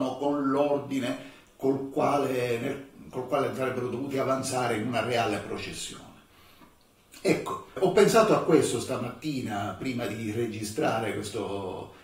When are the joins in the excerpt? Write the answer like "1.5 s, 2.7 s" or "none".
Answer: 7.8 s